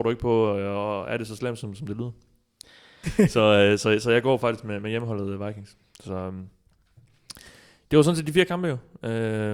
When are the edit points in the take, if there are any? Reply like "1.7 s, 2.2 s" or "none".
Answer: 3.0 s